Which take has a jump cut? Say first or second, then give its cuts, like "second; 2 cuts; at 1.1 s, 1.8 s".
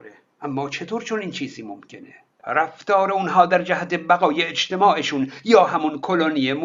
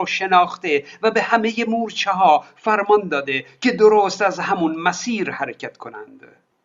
first; 1 cut; at 2.4 s